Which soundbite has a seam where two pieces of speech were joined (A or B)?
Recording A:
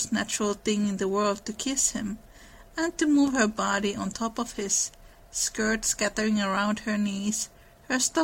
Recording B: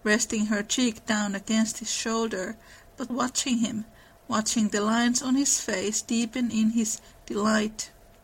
B